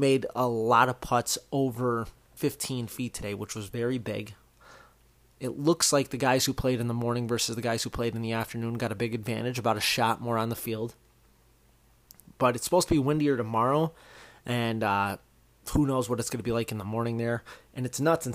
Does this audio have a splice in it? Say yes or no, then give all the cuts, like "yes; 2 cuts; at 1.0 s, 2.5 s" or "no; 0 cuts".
no; 0 cuts